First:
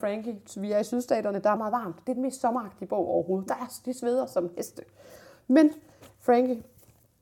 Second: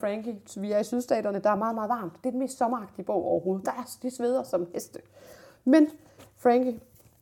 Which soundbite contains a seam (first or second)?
first